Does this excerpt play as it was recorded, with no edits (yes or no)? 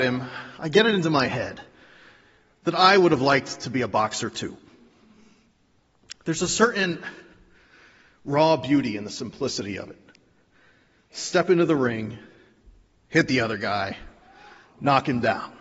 yes